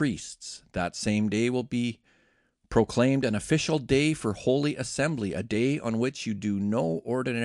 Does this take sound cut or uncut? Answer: uncut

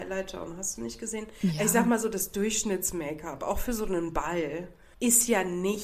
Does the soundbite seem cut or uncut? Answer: uncut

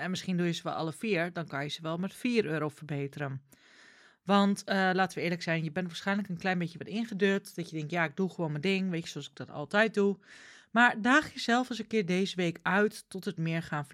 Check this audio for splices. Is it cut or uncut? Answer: uncut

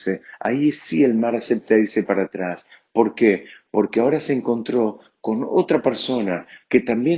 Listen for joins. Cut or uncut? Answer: uncut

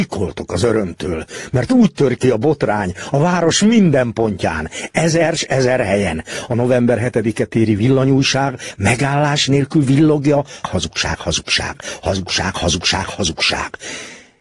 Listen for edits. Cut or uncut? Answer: cut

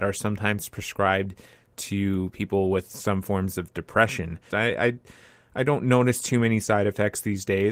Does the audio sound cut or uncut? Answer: cut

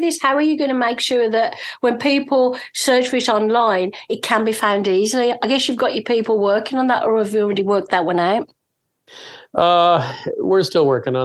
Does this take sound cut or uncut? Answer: uncut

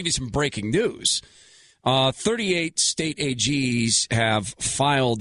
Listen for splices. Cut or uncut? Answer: uncut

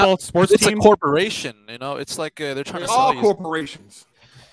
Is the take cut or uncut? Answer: uncut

